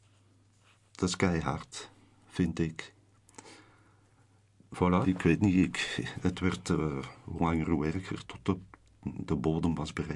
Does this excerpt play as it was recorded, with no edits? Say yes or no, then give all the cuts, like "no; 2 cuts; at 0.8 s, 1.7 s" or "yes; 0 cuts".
no; 2 cuts; at 5.0 s, 8.2 s